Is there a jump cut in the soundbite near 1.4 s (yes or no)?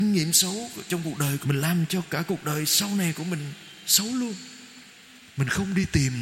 yes